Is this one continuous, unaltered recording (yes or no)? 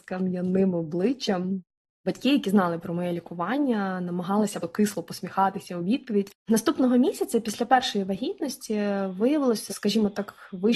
no